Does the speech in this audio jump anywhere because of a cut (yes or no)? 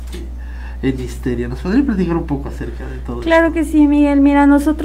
no